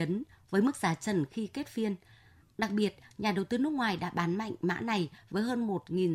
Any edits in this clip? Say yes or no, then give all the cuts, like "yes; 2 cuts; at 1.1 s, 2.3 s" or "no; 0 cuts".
no; 0 cuts